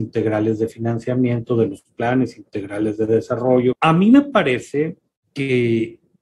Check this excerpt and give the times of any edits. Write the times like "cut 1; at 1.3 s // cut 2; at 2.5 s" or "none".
cut 1; at 3.7 s